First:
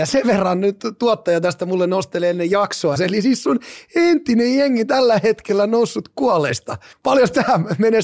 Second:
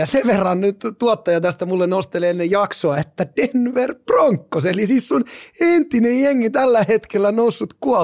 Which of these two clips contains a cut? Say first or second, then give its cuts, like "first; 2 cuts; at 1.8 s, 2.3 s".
first; 2 cuts; at 3.0 s, 6.9 s